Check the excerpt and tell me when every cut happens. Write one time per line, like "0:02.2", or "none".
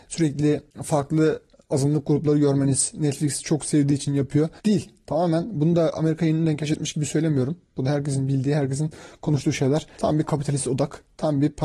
0:04.6
0:10.0